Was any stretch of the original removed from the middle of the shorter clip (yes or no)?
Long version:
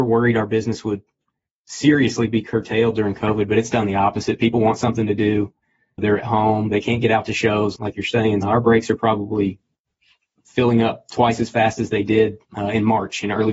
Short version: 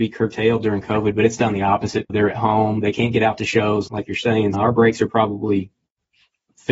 yes